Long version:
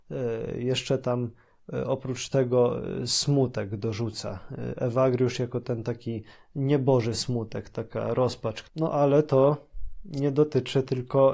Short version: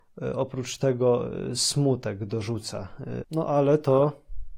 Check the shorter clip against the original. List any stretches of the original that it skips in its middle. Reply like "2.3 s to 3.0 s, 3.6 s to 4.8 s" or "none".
4.8 s to 8.7 s